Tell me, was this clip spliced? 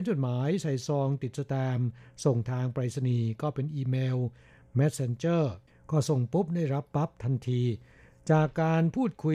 no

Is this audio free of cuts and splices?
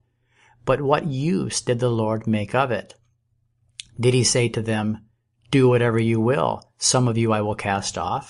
yes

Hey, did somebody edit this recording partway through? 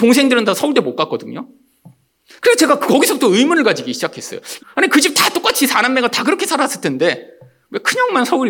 yes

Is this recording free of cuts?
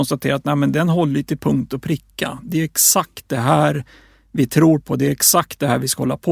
yes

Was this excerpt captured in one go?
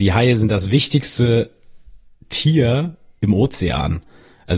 yes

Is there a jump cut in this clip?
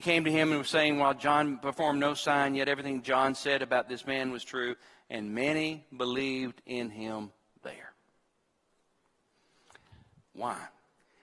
yes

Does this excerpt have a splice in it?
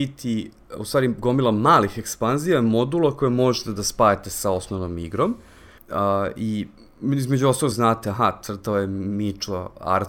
yes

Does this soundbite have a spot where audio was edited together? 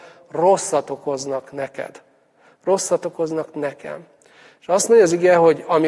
no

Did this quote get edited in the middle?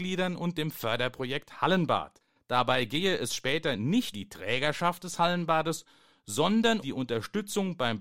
yes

